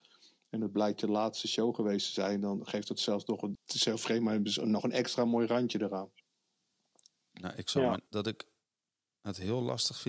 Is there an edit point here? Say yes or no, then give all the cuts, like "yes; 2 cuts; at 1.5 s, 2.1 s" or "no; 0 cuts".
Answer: yes; 2 cuts; at 3.6 s, 8.1 s